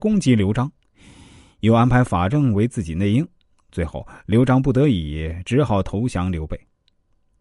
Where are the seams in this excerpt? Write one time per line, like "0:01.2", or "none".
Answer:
none